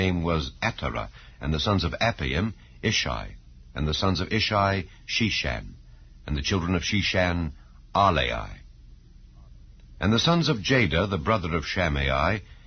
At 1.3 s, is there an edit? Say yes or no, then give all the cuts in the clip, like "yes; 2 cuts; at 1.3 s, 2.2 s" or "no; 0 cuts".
yes; 1 cut; at 1.3 s